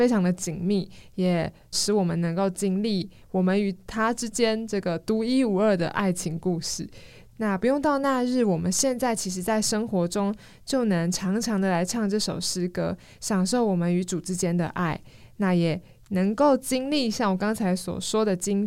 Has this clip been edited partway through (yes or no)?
yes